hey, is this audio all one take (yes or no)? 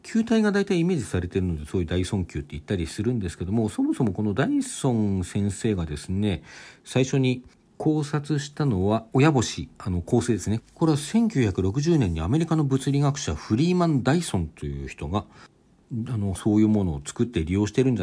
no